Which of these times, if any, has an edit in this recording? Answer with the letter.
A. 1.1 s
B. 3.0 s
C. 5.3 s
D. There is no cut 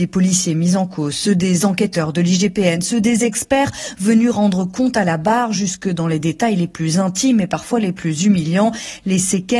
D